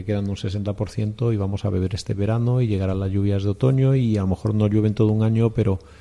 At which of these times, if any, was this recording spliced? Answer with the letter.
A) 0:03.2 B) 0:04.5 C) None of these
C